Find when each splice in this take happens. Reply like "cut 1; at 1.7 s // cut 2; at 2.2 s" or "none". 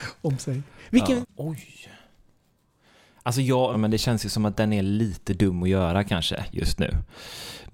cut 1; at 1.2 s // cut 2; at 3.7 s